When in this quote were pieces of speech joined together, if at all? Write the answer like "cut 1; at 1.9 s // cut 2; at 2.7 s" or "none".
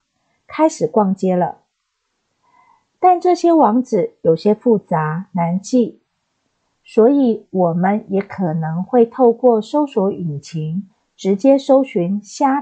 none